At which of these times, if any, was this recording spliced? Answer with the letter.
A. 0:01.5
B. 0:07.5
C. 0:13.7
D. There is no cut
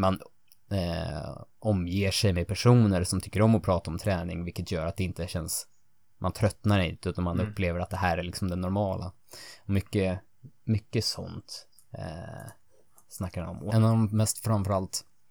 C